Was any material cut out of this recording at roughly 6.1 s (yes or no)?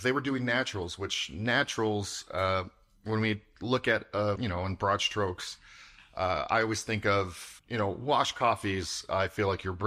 no